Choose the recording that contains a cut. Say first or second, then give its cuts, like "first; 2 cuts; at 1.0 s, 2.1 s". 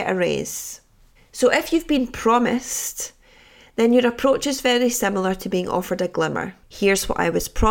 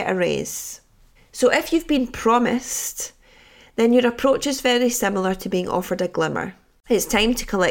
first; 1 cut; at 6.6 s